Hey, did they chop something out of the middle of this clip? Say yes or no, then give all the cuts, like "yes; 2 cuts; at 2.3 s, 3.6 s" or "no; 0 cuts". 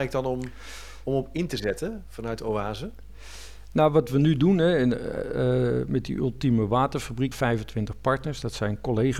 yes; 1 cut; at 7.3 s